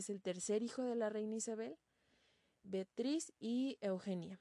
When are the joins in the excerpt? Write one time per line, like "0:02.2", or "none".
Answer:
0:02.6